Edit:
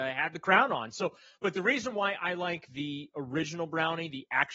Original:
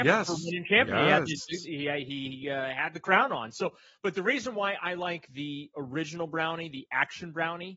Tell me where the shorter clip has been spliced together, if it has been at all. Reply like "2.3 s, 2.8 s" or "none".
none